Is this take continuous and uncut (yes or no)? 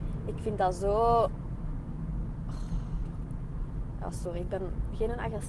yes